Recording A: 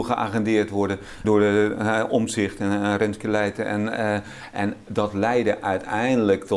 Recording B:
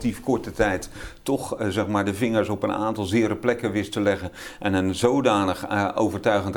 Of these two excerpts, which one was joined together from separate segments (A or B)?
A